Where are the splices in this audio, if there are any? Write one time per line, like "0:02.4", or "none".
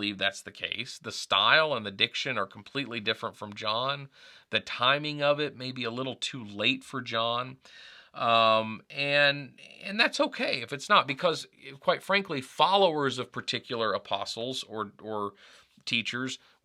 none